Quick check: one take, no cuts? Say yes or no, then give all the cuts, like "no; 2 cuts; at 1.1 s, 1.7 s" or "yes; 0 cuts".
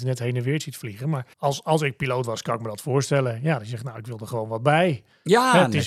no; 1 cut; at 1.3 s